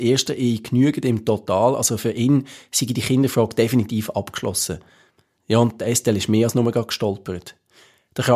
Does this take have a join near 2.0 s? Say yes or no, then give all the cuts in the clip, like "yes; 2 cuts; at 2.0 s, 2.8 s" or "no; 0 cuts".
no; 1 cut; at 5.4 s